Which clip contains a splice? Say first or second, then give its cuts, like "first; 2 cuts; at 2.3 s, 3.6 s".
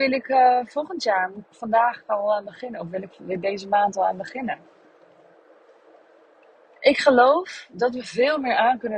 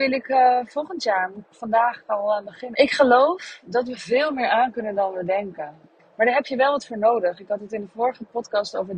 second; 2 cuts; at 2.7 s, 6.0 s